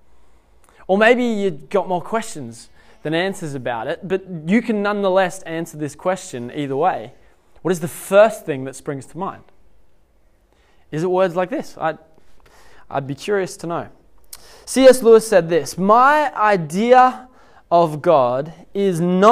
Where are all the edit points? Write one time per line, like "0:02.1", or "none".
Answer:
none